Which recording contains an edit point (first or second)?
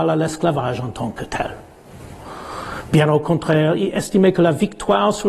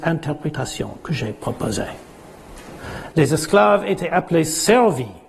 second